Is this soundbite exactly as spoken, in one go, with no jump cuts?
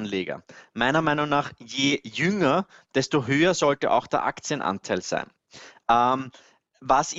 yes; 0 cuts

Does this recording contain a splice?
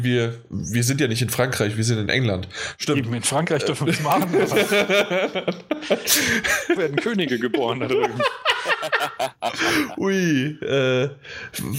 yes; 1 cut; at 6.8 s

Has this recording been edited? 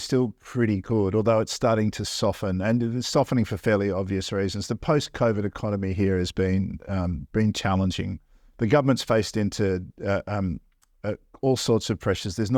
no; 0 cuts

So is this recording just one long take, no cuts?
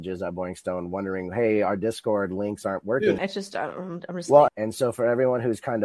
no; 2 cuts; at 3.2 s, 4.5 s

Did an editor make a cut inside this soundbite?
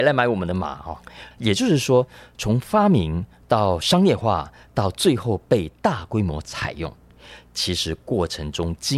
yes; 1 cut; at 1.3 s

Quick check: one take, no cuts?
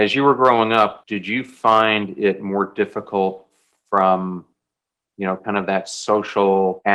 no; 1 cut; at 1.0 s

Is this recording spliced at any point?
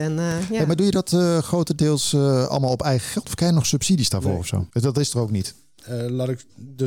yes; 1 cut; at 4.7 s

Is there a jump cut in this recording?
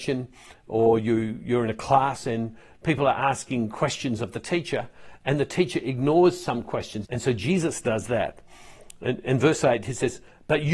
yes; 1 cut; at 7.0 s

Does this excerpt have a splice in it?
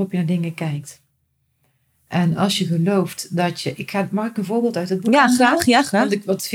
no; 0 cuts

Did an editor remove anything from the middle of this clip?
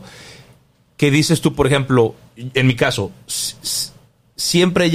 no; 0 cuts

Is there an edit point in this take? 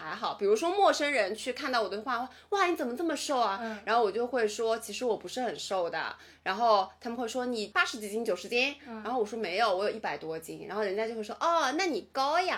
no; 0 cuts

